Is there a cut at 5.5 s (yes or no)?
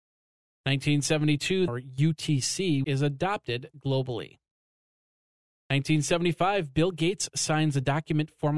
no